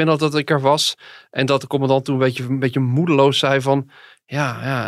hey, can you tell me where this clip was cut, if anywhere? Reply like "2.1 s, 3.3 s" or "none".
none